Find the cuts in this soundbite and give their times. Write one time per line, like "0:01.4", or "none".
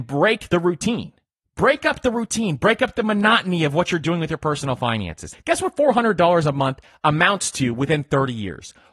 0:05.3

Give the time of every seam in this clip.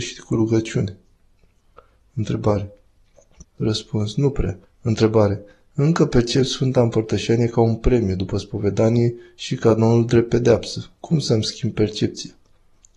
0:03.4
0:04.7

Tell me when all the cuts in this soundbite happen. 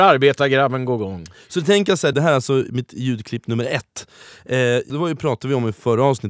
0:02.1
0:04.9

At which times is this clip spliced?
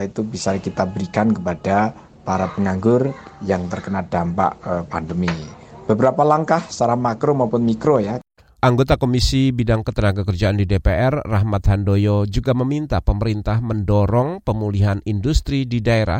none

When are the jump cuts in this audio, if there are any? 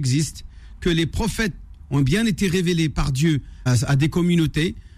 0:03.7

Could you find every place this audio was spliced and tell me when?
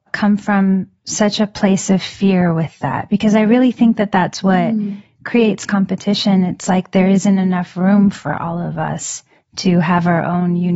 none

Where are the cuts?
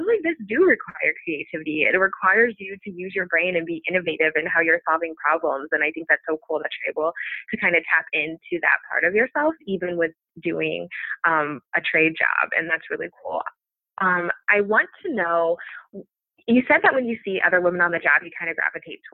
none

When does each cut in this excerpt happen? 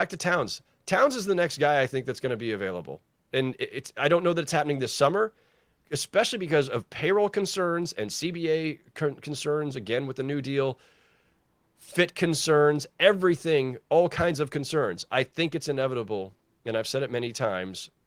0:05.8

